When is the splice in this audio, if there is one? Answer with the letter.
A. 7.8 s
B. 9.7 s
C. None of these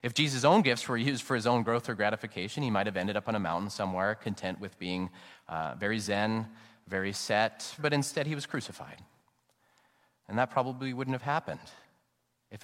A